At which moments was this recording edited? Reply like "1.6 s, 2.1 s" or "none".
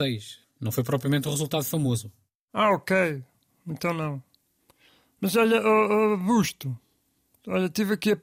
none